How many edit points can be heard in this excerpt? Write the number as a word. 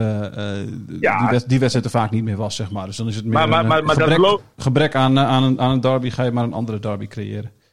zero